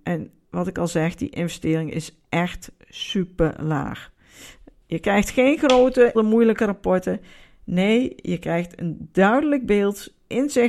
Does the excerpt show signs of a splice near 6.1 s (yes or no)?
yes